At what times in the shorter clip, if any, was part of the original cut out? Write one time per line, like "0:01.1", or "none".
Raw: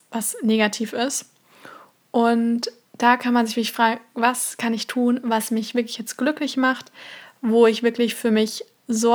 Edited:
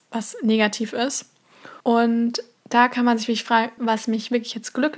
0:01.8
0:03.8